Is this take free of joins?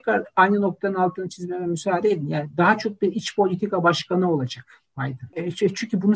yes; 0 cuts

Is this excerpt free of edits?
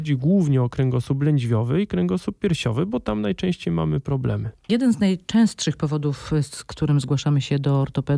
no; 1 cut; at 4.7 s

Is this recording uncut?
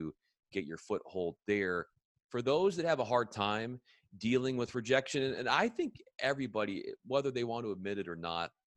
yes; 0 cuts

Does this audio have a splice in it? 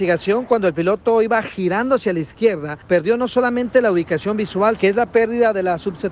yes; 1 cut; at 4.8 s

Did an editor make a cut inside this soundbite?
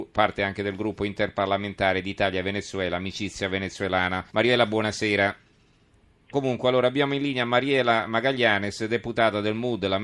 yes; 2 cuts; at 4.3 s, 6.3 s

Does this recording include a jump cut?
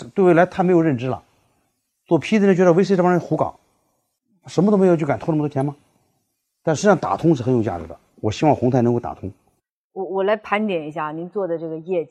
no; 0 cuts

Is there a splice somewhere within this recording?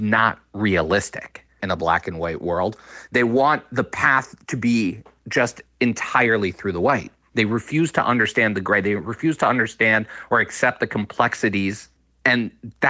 yes; 1 cut; at 1.6 s

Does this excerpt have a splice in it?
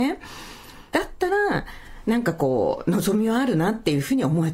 yes; 1 cut; at 0.9 s

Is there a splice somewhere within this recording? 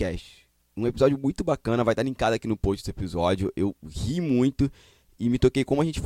no; 0 cuts

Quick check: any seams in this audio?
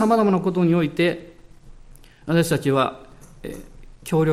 no; 0 cuts

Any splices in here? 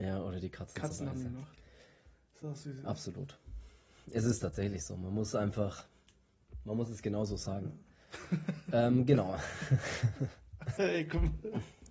yes; 2 cuts; at 8.0 s, 10.8 s

